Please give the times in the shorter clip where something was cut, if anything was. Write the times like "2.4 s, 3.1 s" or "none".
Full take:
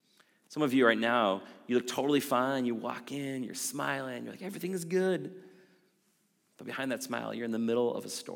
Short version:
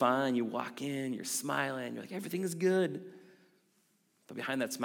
none